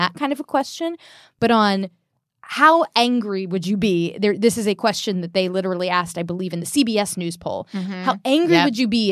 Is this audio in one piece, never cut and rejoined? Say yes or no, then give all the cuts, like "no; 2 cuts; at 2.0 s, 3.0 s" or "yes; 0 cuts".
yes; 0 cuts